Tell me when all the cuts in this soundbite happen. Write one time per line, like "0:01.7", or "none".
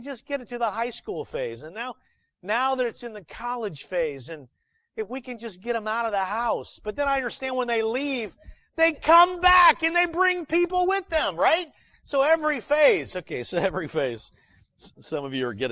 none